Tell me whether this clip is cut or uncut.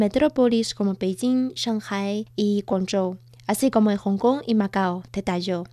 uncut